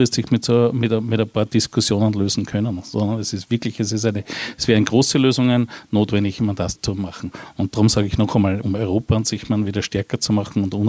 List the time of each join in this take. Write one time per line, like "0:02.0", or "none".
0:06.7
0:08.6